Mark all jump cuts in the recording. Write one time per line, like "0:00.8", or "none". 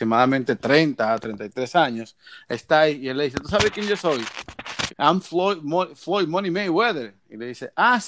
0:01.2
0:04.9